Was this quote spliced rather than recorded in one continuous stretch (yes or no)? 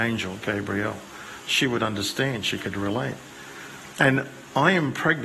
no